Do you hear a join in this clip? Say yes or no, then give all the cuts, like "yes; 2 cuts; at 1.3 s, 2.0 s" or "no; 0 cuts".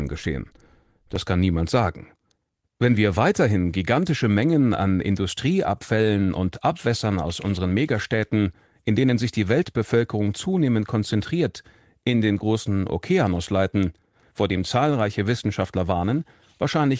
yes; 1 cut; at 14.3 s